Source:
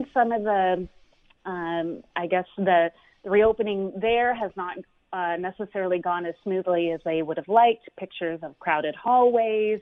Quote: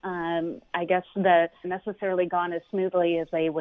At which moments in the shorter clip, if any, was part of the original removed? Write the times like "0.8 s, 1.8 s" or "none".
1.6 s